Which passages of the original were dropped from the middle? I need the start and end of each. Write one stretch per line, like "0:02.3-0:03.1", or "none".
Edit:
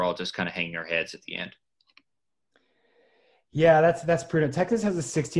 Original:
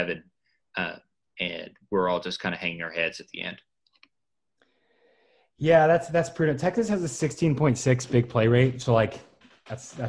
none

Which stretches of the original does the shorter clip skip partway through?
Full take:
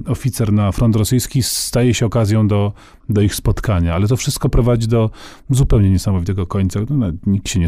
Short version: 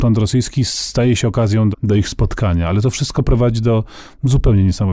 0:02.5-0:03.0

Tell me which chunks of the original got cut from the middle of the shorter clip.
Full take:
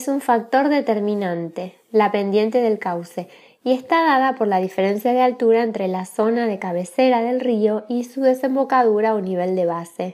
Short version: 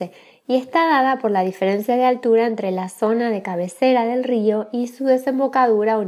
none

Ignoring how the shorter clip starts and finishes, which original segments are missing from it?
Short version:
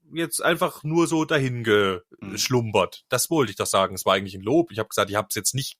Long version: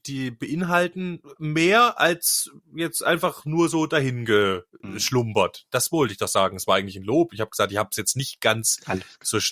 none

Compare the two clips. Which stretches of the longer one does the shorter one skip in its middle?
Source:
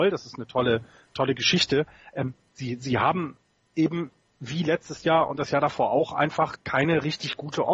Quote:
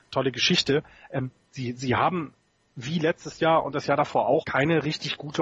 0:03.6-0:04.2
0:06.1-0:06.6

